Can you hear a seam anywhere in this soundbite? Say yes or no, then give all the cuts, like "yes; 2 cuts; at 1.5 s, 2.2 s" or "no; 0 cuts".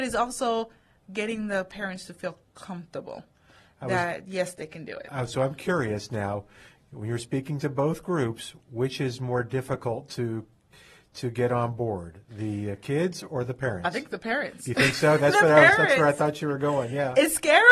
no; 0 cuts